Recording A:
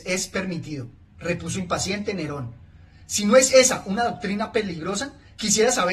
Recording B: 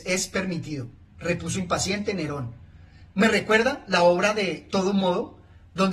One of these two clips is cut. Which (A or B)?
B